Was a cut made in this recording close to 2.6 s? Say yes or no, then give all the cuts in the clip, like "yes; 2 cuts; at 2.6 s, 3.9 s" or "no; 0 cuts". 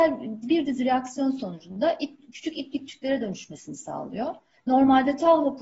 no; 1 cut; at 4.6 s